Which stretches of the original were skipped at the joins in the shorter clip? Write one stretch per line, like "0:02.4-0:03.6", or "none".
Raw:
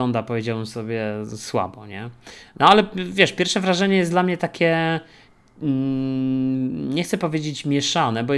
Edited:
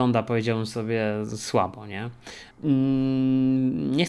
0:02.5-0:05.5